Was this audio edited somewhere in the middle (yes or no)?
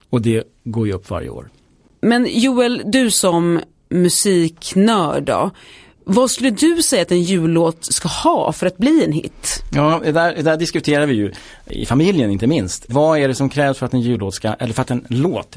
no